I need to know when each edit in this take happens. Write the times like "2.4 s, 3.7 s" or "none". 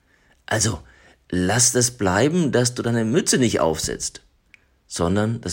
none